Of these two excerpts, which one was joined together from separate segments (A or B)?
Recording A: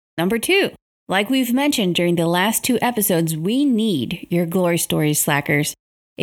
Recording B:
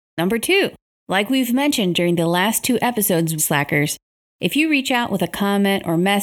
B